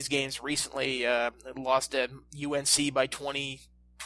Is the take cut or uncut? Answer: uncut